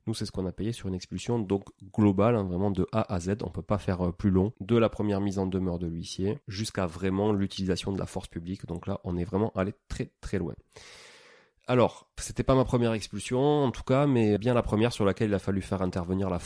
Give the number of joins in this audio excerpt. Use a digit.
1